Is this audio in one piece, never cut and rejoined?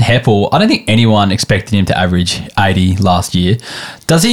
yes; 0 cuts

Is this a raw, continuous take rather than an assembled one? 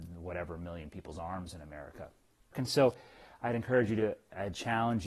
no; 1 cut; at 2.5 s

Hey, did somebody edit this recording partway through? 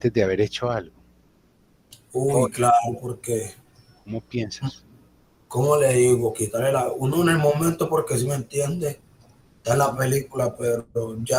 no; 0 cuts

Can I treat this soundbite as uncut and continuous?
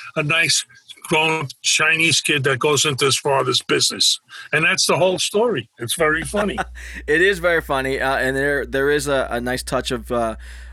yes; 0 cuts

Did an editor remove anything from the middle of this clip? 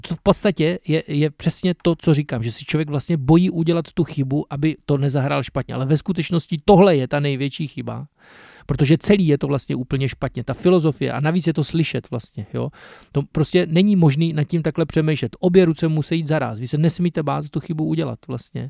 no; 0 cuts

